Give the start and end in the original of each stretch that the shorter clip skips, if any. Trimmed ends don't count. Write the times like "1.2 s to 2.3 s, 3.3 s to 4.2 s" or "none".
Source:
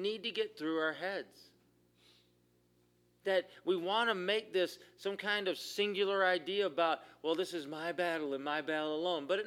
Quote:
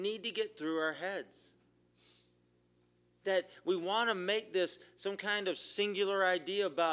none